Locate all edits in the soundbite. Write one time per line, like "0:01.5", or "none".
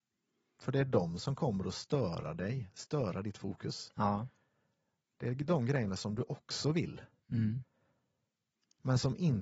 none